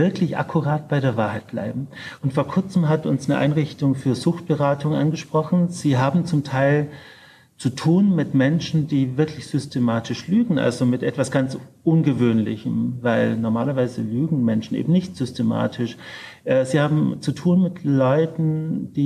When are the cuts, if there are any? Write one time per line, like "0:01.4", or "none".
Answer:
0:02.2